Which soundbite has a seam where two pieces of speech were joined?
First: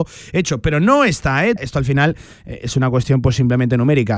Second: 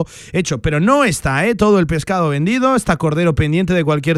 first; 1 cut; at 1.6 s

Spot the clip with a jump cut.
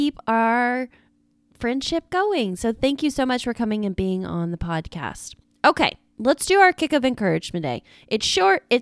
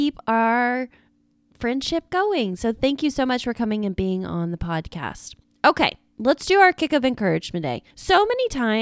second; 1 cut; at 7.9 s

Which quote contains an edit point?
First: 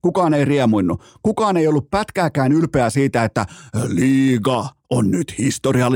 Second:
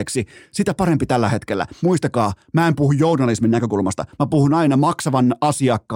second; 1 cut; at 1.8 s

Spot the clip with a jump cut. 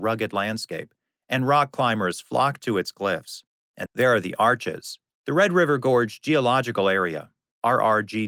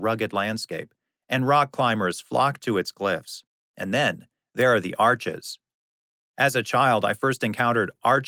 first; 2 cuts; at 3.9 s, 5.2 s

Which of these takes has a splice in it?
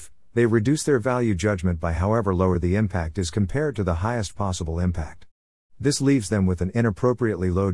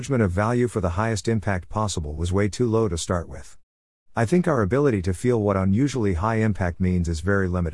second; 1 cut; at 4.0 s

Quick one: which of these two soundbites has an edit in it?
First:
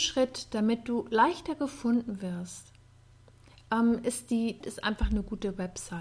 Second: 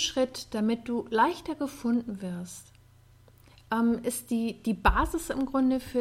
first; 1 cut; at 4.6 s

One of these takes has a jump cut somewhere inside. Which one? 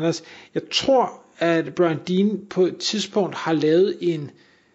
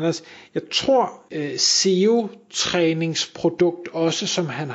second; 1 cut; at 1.3 s

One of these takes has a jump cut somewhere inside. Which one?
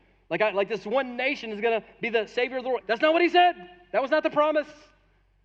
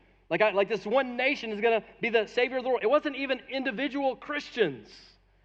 first; 1 cut; at 2.8 s

